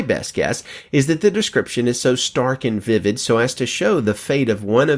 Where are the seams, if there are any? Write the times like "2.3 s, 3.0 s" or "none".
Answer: none